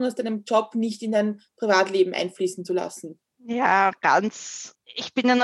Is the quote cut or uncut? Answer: uncut